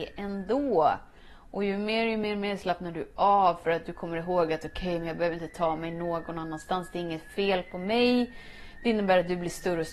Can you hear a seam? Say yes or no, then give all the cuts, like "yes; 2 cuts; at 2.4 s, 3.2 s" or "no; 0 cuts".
no; 0 cuts